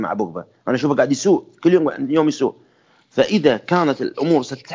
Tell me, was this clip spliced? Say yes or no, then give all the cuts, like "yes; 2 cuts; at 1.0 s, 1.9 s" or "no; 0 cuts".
no; 0 cuts